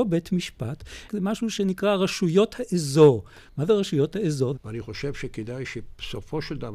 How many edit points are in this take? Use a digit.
2